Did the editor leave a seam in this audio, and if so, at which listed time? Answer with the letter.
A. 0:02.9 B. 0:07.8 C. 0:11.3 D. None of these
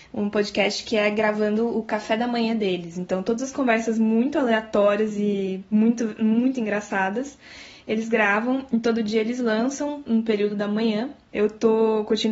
C